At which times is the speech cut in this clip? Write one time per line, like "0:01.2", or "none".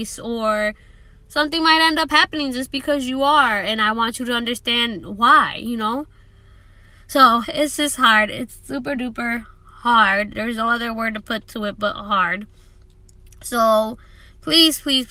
0:07.4
0:08.9